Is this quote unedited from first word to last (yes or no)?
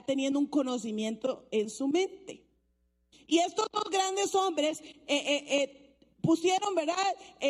yes